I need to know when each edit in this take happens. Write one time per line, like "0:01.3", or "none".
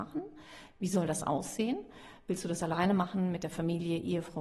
none